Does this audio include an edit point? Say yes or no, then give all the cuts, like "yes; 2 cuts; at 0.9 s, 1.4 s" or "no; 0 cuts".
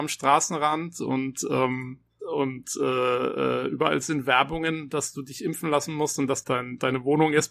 yes; 2 cuts; at 2.2 s, 6.4 s